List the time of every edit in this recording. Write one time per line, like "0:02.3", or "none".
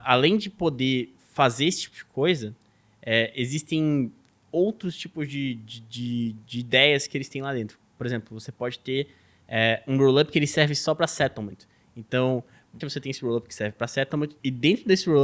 0:12.8